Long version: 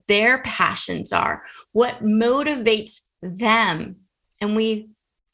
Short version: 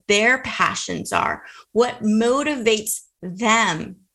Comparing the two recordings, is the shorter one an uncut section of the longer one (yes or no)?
yes